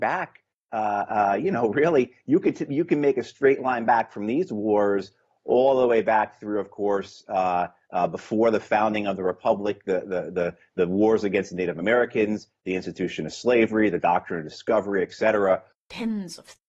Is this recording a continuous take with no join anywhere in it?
no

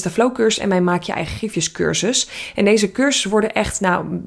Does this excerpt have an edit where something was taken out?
no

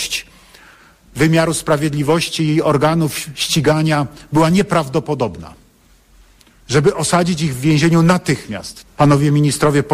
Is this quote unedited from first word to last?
no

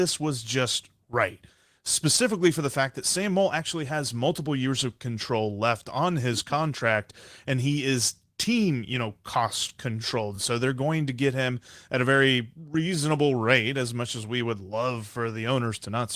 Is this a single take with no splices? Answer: yes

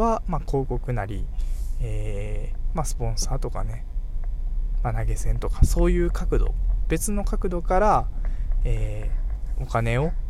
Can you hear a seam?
no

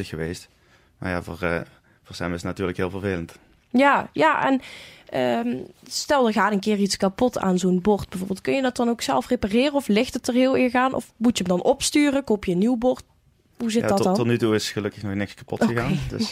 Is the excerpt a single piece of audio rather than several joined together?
yes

